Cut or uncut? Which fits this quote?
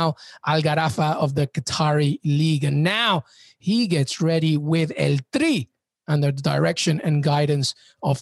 uncut